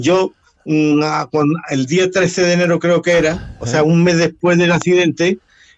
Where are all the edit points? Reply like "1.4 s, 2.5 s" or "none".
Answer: none